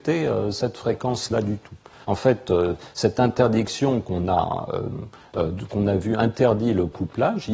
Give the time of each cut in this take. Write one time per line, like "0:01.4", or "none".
0:02.0